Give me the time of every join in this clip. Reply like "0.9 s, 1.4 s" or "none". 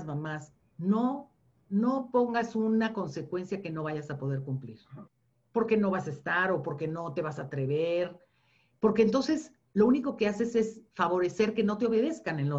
none